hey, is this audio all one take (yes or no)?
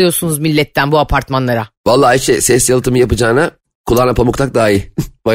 yes